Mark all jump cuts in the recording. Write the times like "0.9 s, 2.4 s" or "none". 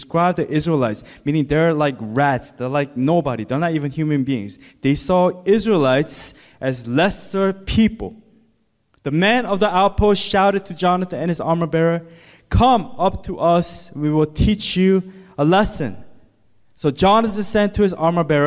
none